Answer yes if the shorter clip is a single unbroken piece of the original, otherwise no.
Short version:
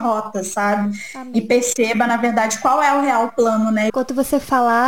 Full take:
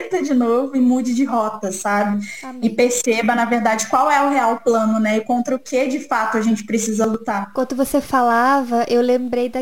no